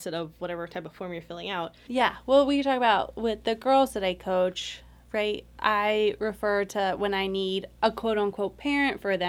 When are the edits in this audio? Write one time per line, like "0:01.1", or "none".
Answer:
0:01.9